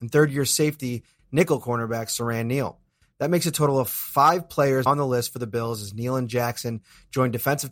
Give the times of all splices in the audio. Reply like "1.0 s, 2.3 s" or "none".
4.9 s